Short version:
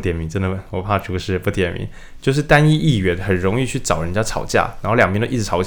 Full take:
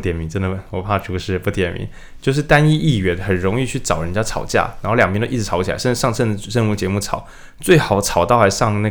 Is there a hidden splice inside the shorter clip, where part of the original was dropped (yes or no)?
no